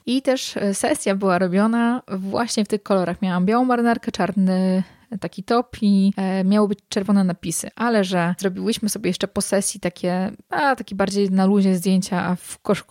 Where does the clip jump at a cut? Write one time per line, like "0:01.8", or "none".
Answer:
none